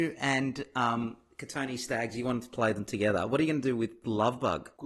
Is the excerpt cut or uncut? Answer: uncut